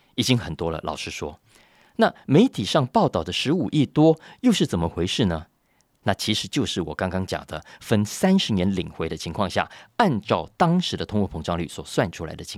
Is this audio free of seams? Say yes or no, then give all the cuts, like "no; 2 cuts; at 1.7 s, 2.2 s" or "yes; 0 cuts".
yes; 0 cuts